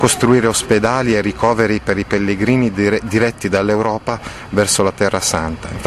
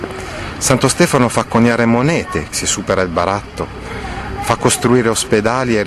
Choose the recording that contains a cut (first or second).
second